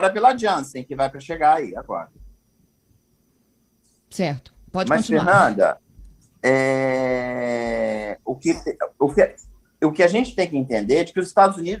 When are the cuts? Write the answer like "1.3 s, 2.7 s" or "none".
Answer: none